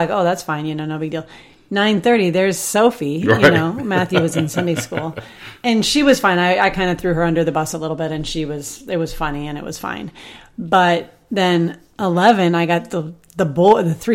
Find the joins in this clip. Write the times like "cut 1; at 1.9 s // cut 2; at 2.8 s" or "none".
none